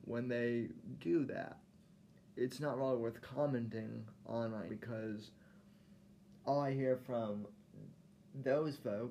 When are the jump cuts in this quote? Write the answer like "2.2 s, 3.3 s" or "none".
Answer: 2.3 s, 4.7 s